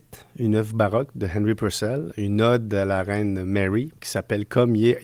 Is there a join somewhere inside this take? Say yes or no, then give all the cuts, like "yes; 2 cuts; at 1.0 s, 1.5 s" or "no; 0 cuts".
yes; 1 cut; at 2.1 s